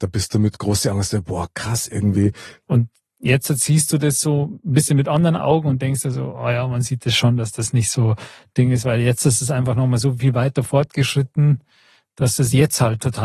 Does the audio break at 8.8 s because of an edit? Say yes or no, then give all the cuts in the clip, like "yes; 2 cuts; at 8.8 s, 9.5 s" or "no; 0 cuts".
no; 1 cut; at 2.6 s